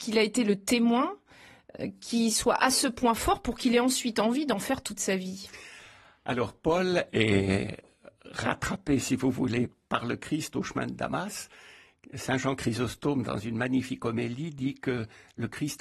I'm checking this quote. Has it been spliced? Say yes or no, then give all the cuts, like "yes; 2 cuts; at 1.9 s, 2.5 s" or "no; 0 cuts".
no; 0 cuts